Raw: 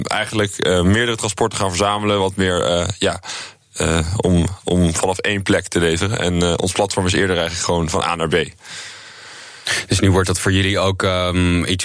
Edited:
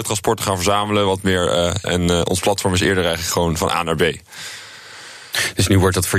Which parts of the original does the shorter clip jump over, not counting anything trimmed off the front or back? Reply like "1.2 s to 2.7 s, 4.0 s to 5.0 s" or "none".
3.0 s to 6.2 s